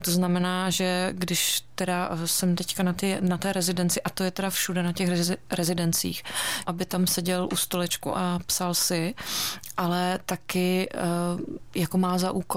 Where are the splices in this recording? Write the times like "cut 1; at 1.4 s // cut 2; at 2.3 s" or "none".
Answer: cut 1; at 6.6 s